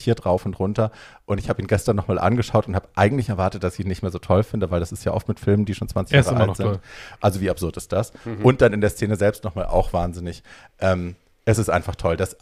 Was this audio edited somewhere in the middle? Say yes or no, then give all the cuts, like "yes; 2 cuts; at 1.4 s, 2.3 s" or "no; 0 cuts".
yes; 1 cut; at 7.2 s